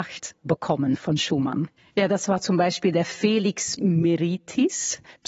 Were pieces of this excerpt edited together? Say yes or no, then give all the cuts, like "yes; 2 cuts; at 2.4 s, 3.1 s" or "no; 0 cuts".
yes; 1 cut; at 1.8 s